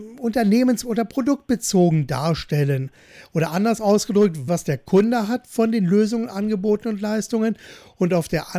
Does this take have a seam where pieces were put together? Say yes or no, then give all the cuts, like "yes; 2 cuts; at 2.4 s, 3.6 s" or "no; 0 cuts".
yes; 1 cut; at 4.5 s